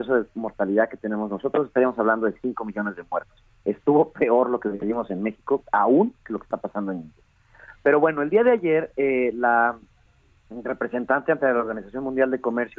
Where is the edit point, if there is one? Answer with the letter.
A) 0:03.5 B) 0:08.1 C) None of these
C